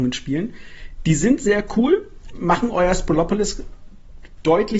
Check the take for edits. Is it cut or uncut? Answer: cut